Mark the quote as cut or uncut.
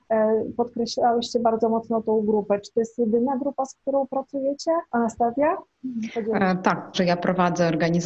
cut